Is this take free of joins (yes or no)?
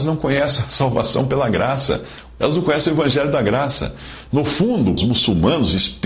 no